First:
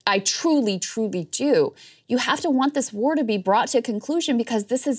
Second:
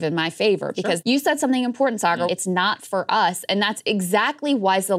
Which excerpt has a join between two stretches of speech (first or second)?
second